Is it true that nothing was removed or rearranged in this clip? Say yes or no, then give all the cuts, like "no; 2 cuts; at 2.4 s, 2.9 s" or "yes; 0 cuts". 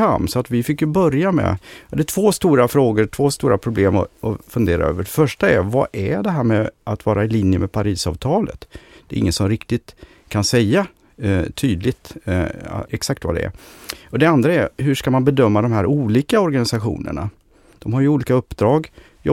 no; 1 cut; at 12.9 s